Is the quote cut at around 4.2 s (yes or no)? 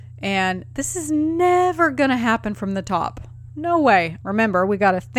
yes